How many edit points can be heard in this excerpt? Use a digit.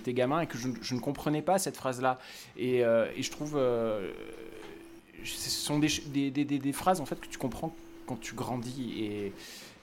0